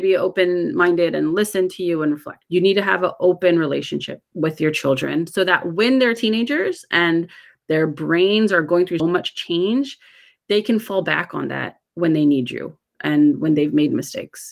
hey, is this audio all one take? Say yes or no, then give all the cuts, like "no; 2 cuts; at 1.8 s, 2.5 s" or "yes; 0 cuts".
no; 2 cuts; at 2.4 s, 9.0 s